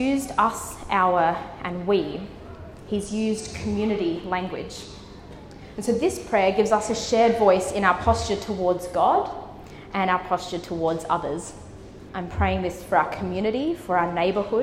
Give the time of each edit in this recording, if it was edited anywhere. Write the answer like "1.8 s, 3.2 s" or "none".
5.7 s, 12.1 s